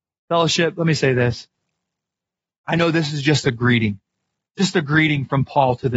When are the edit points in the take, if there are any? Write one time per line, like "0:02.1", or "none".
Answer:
none